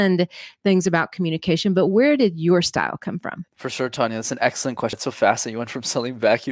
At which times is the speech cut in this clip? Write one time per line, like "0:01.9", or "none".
0:03.5
0:04.9